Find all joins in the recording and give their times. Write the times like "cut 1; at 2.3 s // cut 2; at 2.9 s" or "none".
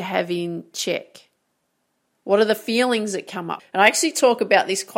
cut 1; at 2.1 s // cut 2; at 3.6 s